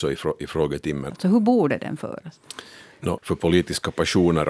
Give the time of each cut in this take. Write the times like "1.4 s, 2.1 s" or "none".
1.1 s, 3.2 s

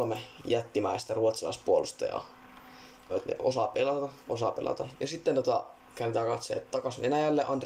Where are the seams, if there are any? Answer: 3.1 s, 4.9 s

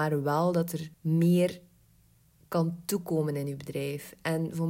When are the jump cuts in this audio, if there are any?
0.9 s

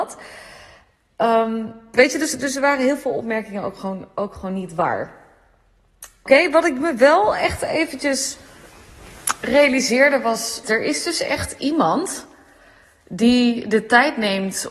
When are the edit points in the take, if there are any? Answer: 1.9 s, 6.3 s, 10.6 s

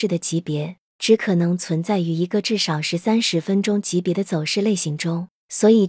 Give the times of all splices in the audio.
0.9 s

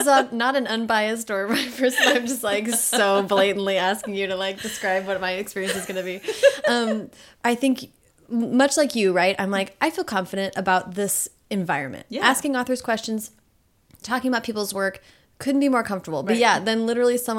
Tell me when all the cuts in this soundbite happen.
none

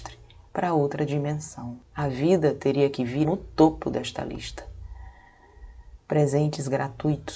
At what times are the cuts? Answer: 1.9 s, 3.2 s, 6.0 s

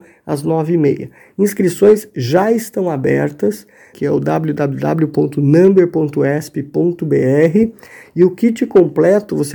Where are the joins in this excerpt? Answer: 3.9 s

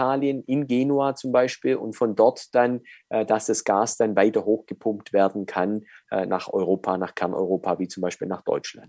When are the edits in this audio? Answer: none

